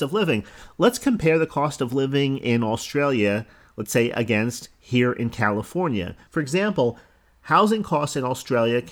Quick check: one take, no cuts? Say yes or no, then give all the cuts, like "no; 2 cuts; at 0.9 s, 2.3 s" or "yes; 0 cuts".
no; 1 cut; at 6.3 s